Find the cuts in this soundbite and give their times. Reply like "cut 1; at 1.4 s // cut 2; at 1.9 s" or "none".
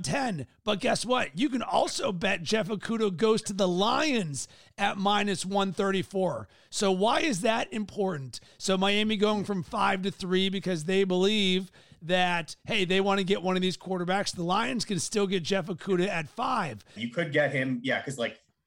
cut 1; at 8.5 s // cut 2; at 17.0 s